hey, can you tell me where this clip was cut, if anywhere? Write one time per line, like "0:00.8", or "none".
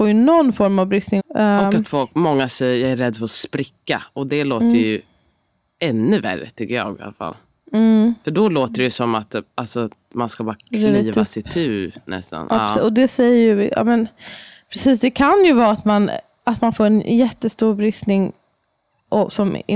0:01.2